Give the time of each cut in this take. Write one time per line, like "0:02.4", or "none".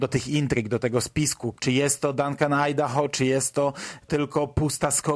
0:01.5